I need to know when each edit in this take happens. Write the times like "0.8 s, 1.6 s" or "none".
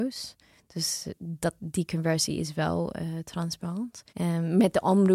4.1 s